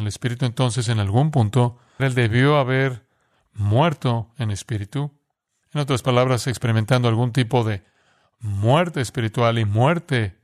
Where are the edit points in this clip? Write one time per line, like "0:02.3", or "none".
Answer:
0:02.0